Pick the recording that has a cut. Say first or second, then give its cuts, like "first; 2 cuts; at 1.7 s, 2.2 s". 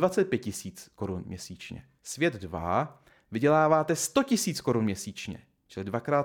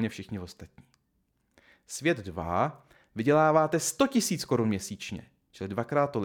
first; 1 cut; at 2.0 s